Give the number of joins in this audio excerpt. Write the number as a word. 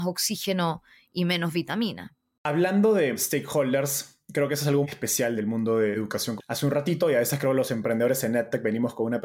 two